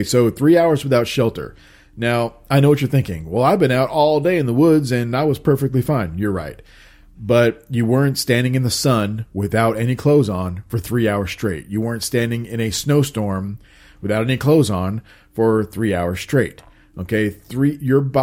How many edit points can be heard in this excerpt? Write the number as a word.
zero